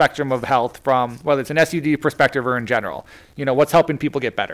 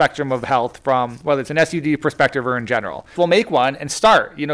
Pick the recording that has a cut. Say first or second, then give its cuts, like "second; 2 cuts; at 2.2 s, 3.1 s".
second; 1 cut; at 3.2 s